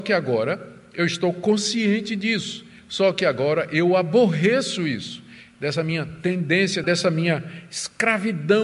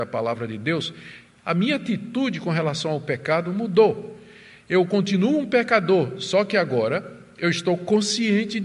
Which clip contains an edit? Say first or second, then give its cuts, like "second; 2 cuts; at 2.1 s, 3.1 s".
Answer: first; 2 cuts; at 5.5 s, 6.8 s